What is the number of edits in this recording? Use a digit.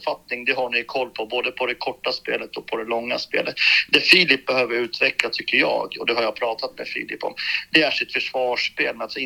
0